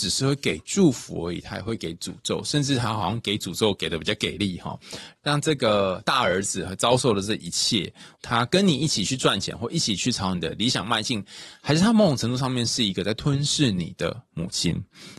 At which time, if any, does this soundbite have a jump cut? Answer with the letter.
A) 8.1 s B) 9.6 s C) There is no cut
A